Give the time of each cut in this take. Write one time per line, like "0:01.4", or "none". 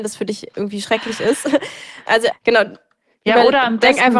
0:02.3